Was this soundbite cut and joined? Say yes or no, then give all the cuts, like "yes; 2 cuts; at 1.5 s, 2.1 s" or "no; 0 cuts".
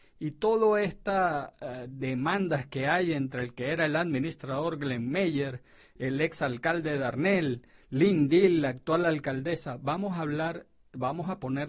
no; 0 cuts